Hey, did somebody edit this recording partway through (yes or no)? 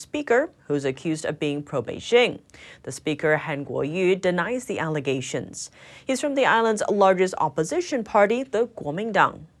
no